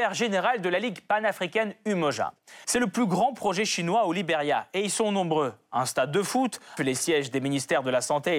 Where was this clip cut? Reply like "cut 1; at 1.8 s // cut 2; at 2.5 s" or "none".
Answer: cut 1; at 2.6 s // cut 2; at 6.8 s

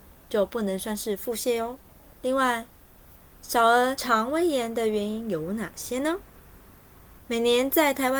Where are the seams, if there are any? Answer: cut 1; at 2.1 s // cut 2; at 7.2 s

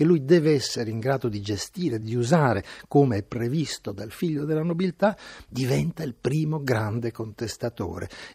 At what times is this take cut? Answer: cut 1; at 2.0 s

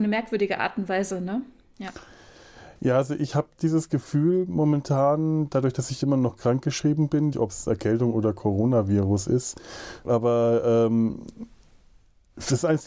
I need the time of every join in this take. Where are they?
cut 1; at 7.3 s // cut 2; at 10.0 s

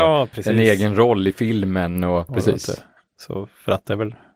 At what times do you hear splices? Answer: cut 1; at 2.3 s

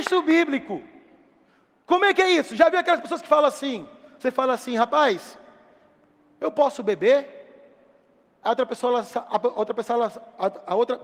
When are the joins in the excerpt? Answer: none

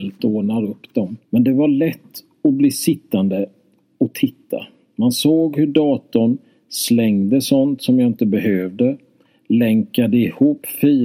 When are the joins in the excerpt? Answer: cut 1; at 1.2 s

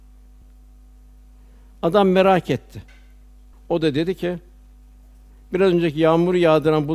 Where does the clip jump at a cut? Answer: cut 1; at 3.5 s

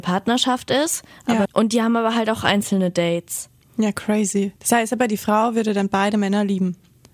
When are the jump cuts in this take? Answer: cut 1; at 1.4 s // cut 2; at 4.6 s

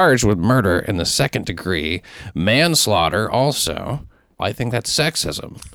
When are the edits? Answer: cut 1; at 4.4 s

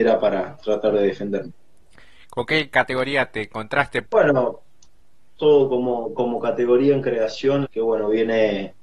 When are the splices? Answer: cut 1; at 4.0 s // cut 2; at 7.6 s

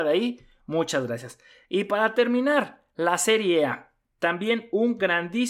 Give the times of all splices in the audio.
none

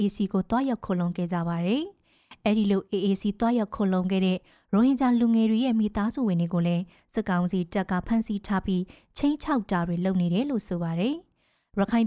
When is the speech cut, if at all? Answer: none

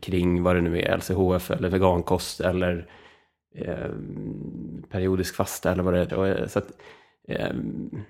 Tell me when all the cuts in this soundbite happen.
cut 1; at 6.1 s

